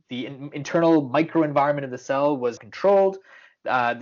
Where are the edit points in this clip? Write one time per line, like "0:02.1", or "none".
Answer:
0:02.6